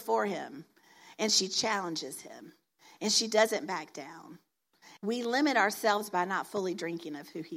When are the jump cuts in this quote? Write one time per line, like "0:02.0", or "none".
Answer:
0:05.0